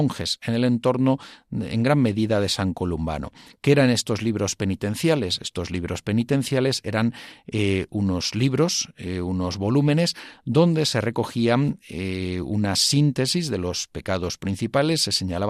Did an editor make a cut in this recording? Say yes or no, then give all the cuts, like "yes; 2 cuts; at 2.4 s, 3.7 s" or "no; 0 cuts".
no; 0 cuts